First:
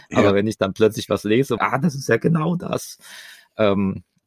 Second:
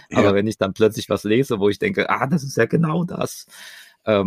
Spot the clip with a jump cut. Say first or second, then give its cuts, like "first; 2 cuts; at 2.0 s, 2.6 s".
first; 1 cut; at 1.6 s